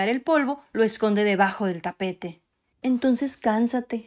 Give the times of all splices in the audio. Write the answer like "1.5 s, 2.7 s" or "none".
2.7 s